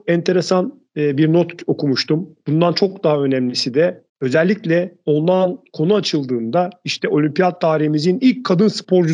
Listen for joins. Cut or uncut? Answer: cut